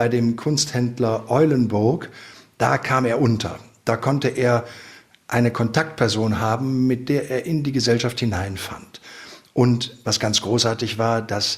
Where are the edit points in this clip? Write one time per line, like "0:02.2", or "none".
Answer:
none